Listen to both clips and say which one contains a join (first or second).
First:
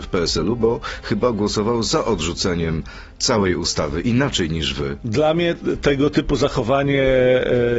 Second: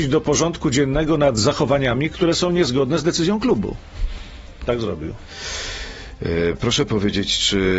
second